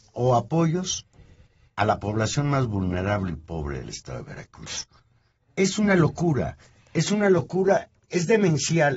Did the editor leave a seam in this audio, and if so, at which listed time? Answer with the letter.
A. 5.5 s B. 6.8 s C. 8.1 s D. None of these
D